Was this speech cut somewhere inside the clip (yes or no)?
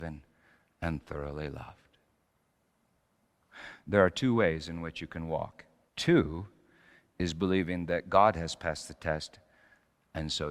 yes